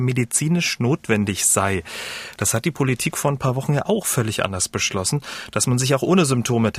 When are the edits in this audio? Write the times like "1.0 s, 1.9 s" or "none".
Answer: none